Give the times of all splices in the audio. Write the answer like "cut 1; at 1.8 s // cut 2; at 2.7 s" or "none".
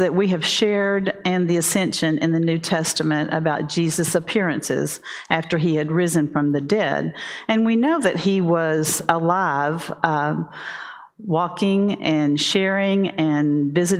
none